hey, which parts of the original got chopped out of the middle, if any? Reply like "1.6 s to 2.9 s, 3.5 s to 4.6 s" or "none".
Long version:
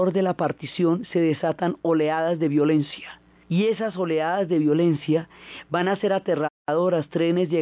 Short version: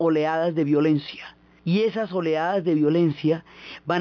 none